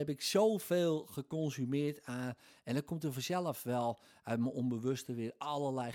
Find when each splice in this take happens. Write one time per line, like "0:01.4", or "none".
none